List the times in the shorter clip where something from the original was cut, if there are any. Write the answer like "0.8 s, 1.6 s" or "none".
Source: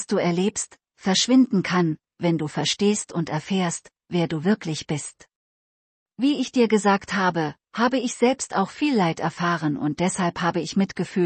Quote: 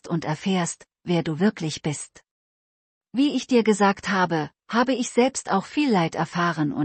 none